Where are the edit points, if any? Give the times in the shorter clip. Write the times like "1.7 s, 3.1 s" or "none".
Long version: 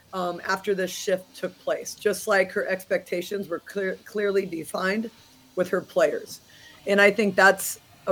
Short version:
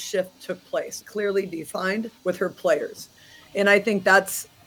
1.0 s, 2.2 s